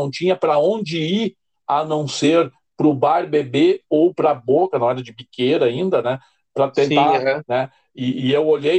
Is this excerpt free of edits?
no; 2 cuts; at 4.7 s, 7.4 s

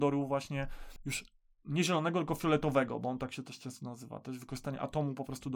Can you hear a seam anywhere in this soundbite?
no; 0 cuts

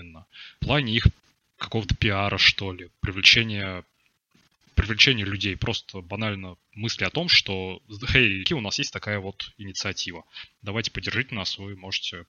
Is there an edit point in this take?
yes; 1 cut; at 8.5 s

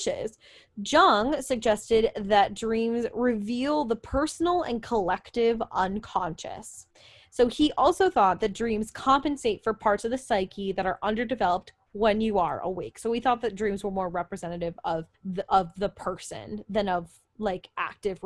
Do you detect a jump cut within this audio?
yes; 1 cut; at 15.1 s

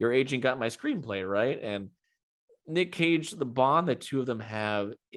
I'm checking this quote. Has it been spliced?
no; 0 cuts

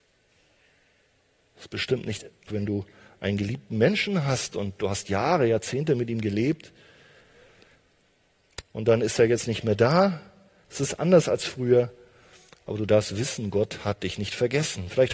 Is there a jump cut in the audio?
yes; 2 cuts; at 2.5 s, 10.6 s

